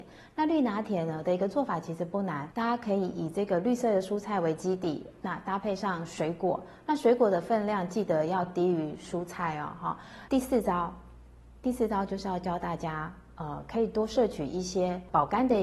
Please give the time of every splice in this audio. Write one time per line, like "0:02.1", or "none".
0:10.3